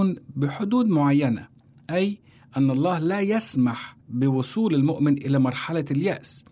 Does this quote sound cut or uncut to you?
cut